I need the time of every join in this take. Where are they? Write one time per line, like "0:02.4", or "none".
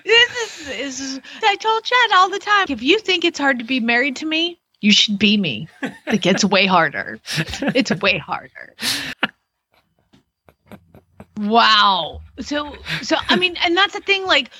0:01.4
0:02.7
0:09.1